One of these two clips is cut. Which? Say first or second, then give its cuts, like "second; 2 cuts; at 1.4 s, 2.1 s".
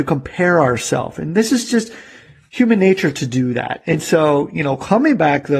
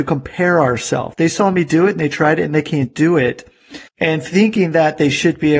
second; 2 cuts; at 1.1 s, 3.9 s